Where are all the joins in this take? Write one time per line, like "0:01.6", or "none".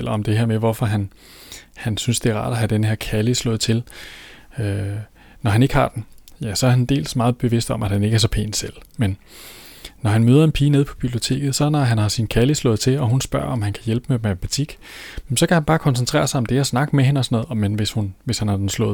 none